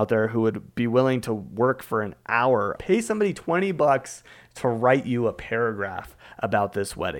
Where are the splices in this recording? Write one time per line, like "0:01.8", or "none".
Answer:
0:02.8